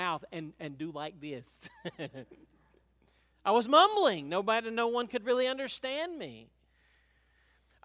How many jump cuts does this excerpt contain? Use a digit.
0